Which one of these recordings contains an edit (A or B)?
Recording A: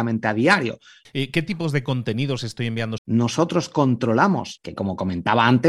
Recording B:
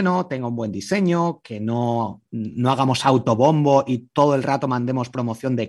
A